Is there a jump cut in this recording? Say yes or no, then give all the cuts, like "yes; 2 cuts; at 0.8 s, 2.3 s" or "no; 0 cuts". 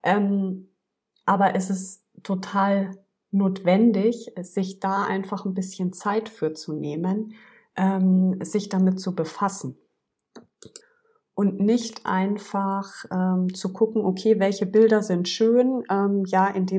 no; 0 cuts